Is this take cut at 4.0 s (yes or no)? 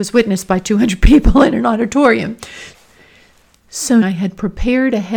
yes